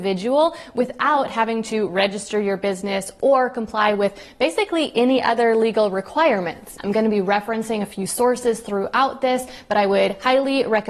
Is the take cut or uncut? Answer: cut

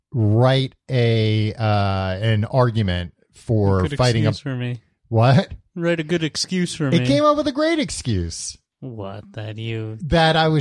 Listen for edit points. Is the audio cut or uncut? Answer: uncut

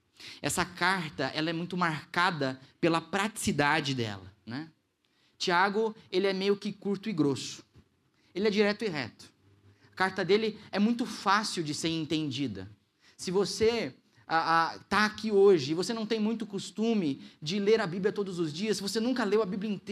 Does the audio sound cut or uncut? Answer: uncut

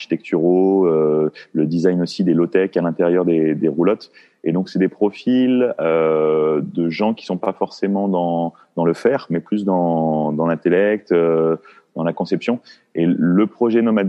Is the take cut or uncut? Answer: uncut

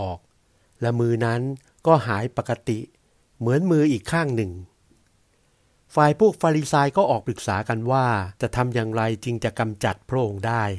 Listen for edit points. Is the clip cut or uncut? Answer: cut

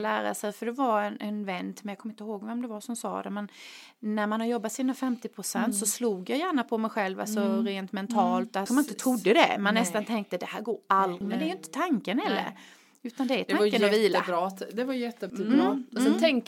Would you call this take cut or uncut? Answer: cut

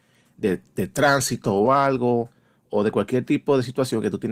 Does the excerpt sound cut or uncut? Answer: uncut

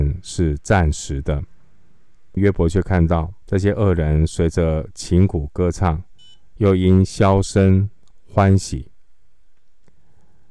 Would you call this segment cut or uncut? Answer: cut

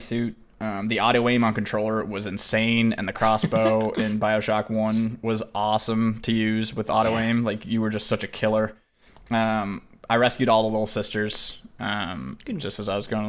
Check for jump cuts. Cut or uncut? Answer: uncut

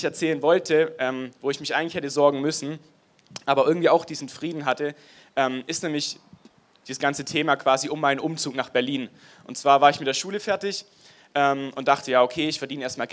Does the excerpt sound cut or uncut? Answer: uncut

